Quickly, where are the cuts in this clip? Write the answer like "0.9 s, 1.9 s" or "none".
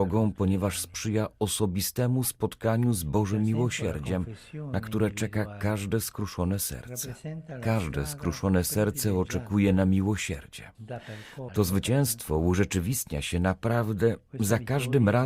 11.5 s